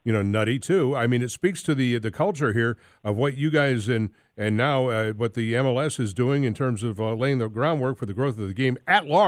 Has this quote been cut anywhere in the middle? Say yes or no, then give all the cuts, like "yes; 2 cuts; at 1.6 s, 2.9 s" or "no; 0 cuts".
no; 0 cuts